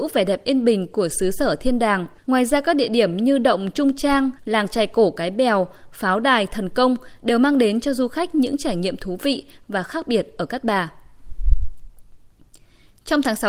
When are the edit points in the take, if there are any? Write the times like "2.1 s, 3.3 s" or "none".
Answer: 2.2 s, 4.4 s

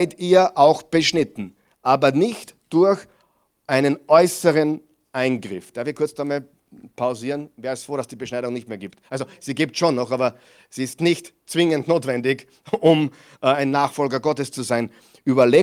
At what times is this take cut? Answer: none

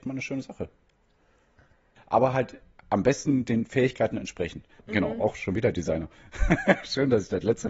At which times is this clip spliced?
2.0 s, 4.8 s

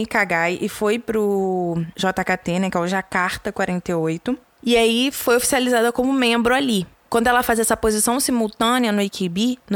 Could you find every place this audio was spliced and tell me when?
none

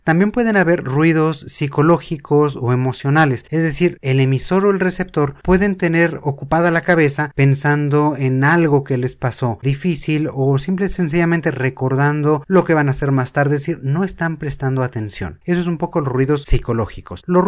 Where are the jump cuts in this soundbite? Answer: 9.6 s

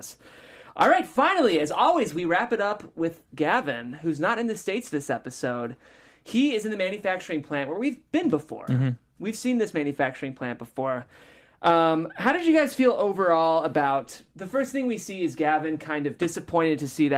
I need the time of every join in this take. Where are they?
none

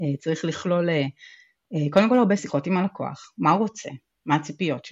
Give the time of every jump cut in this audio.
2.4 s

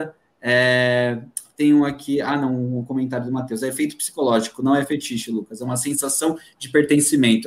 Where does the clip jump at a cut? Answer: none

